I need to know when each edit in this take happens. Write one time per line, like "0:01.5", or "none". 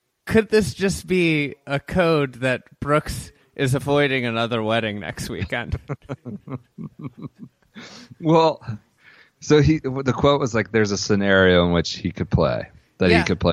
none